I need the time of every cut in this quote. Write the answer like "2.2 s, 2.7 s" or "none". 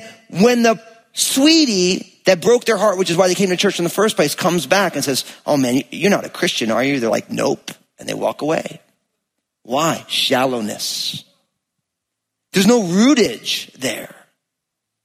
none